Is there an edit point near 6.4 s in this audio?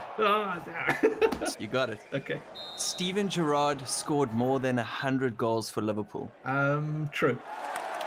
no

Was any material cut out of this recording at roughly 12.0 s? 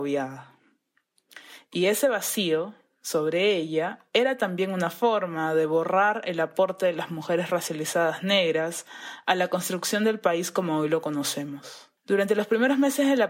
yes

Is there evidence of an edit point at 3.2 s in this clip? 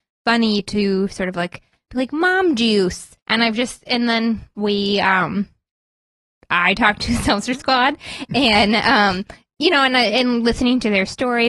yes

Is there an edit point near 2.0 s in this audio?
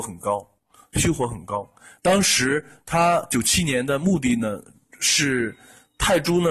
yes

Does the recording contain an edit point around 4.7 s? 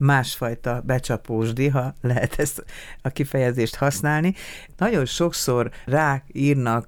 no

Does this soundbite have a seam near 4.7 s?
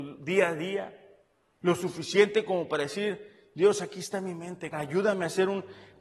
yes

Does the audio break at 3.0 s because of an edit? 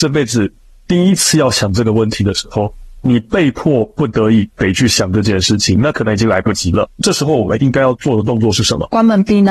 yes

